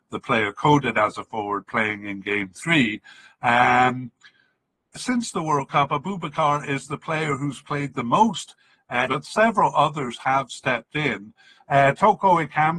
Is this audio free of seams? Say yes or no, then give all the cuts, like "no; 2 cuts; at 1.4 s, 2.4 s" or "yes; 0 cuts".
no; 3 cuts; at 5.0 s, 9.1 s, 11.6 s